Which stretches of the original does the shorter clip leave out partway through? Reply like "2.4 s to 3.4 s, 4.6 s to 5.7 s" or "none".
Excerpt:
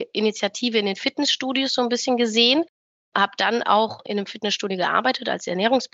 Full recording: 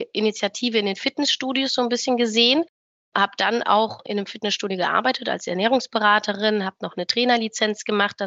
none